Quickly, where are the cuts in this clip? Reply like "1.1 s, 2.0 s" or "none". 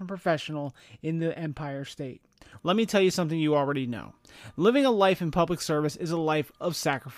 2.6 s